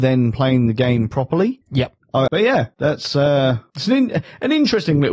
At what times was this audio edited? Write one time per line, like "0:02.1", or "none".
0:02.3